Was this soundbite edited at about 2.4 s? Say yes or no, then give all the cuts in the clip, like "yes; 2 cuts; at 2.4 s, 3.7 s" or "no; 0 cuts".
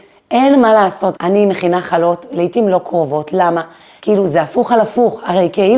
no; 2 cuts; at 1.1 s, 4.0 s